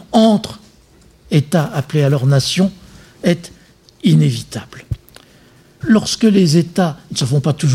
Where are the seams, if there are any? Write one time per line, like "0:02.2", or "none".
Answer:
0:05.8